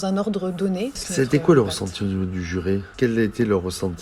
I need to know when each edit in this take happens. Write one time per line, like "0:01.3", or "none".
0:01.0
0:02.9

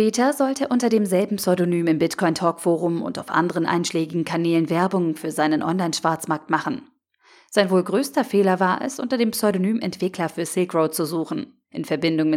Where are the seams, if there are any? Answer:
none

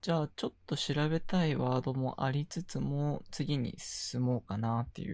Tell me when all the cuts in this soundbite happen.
none

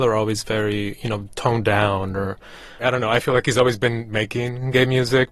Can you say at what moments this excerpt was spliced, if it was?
none

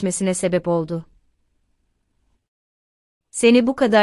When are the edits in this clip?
none

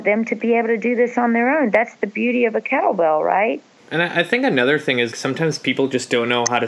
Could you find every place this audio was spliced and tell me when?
0:03.8
0:05.1

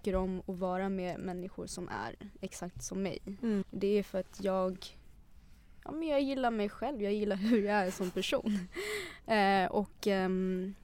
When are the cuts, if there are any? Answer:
0:03.6

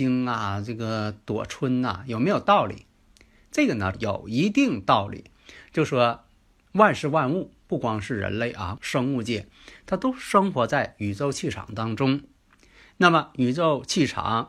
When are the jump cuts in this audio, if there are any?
0:03.9
0:06.7
0:08.8

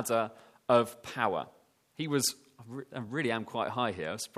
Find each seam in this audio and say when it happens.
none

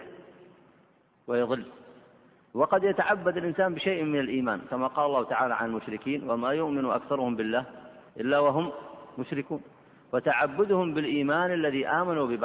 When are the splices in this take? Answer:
0:08.1

